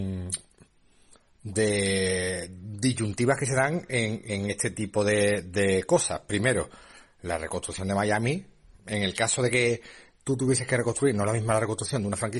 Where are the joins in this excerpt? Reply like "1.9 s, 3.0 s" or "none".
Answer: none